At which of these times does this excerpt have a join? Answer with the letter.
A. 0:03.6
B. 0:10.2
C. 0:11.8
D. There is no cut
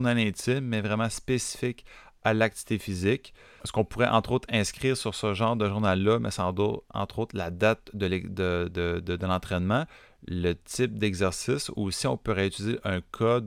A